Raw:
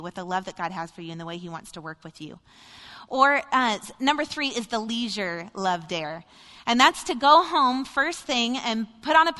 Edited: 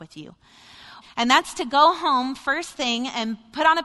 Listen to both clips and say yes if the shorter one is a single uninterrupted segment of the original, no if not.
no